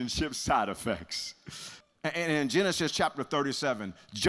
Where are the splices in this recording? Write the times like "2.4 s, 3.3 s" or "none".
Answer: 1.8 s

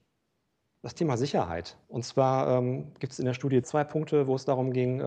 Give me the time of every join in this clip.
1.8 s, 3.6 s

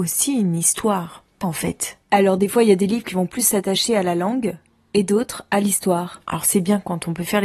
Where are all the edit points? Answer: 1.4 s

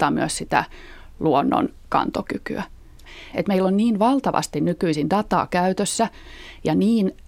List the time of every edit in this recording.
3.3 s

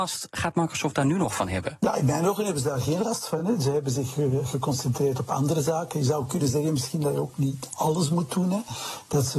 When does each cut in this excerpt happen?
none

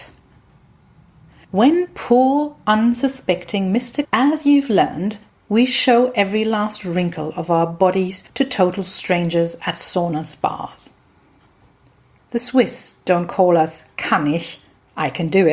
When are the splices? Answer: 4.0 s, 12.2 s

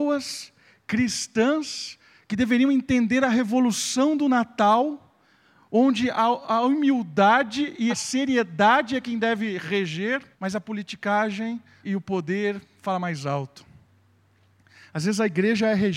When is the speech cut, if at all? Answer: 7.9 s, 10.3 s, 11.8 s

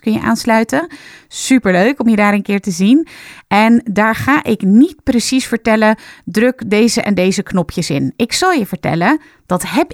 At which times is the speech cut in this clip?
none

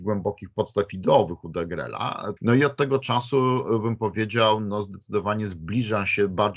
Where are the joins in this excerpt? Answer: 2.4 s

